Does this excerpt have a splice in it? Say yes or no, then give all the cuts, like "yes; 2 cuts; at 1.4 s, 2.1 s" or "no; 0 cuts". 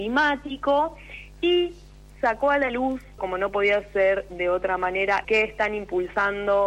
yes; 2 cuts; at 3.2 s, 5.2 s